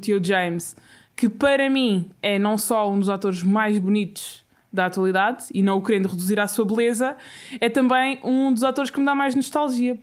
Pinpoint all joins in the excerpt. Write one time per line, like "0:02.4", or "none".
none

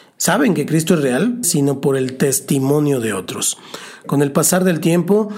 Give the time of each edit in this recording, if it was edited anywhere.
0:01.4

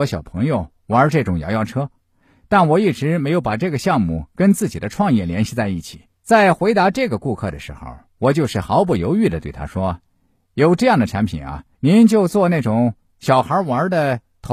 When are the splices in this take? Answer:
0:06.1
0:11.7

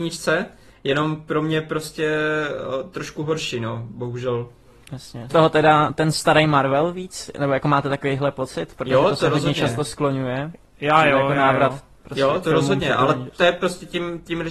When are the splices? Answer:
0:05.3
0:12.4

